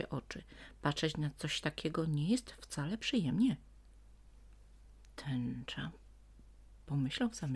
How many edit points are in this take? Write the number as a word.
zero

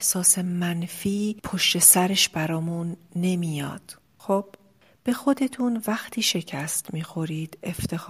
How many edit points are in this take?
zero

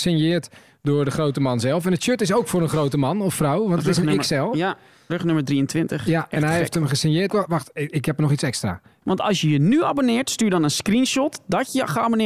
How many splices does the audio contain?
two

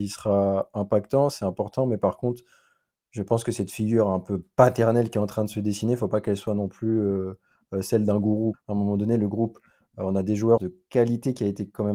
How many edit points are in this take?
two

